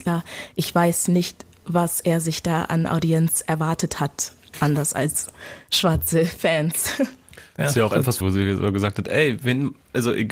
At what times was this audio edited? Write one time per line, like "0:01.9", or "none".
0:08.2

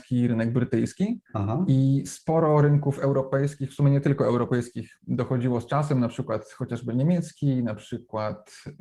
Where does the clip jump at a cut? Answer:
0:01.3

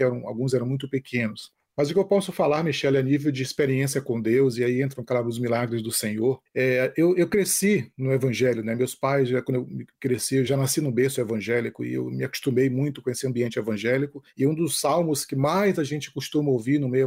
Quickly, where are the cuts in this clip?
0:10.5

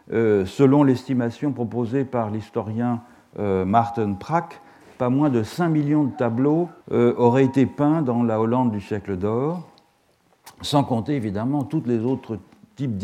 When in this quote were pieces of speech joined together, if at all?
0:06.8

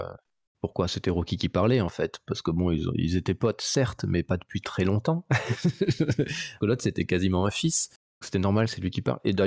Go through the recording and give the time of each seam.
0:06.6
0:08.2

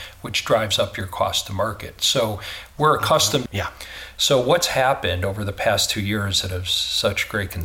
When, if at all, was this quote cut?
0:03.5

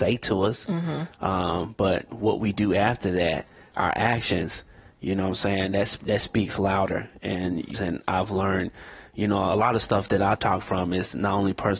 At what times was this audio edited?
0:01.1
0:07.7
0:10.4

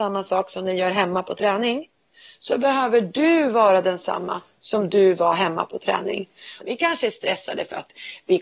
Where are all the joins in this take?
0:06.6

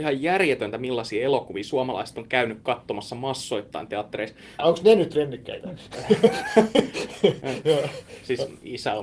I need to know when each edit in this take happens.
0:04.6

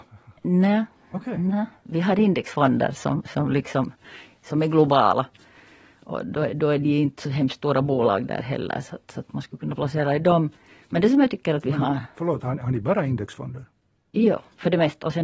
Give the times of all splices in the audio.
none

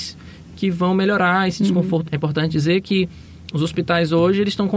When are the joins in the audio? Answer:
0:02.1

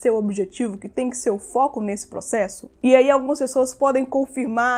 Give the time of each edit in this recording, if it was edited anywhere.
0:02.8

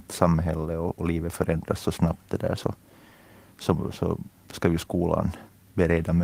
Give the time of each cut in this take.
none

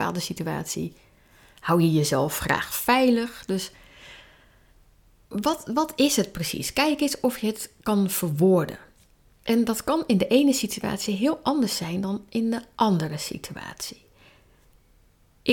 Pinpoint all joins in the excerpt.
none

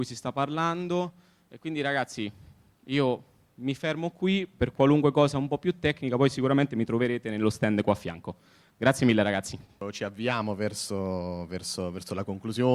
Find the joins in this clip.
none

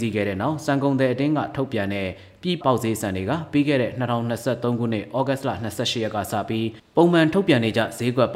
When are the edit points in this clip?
0:02.6

